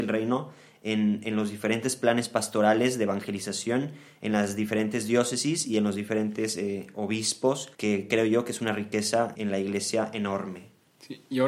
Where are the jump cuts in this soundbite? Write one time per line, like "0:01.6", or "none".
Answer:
0:07.7
0:09.4